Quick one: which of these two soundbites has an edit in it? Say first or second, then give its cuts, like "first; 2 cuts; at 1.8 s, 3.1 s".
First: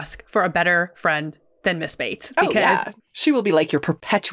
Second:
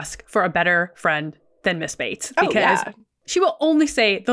first; 1 cut; at 3.0 s